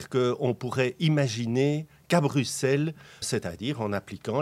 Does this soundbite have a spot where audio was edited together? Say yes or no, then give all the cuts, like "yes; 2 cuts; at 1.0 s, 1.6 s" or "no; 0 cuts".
yes; 1 cut; at 3.2 s